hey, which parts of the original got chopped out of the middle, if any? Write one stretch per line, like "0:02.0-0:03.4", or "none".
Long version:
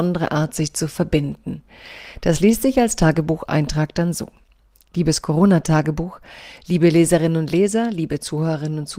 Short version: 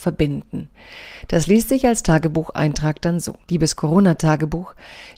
0:04.3-0:04.9